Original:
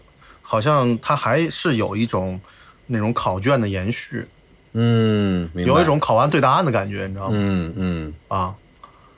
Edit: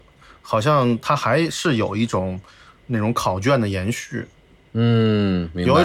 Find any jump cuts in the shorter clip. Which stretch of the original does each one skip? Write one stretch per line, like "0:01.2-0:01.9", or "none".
none